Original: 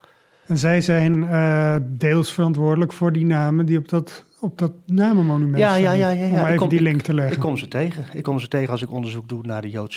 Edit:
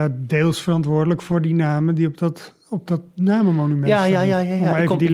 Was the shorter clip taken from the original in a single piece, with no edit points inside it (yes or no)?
yes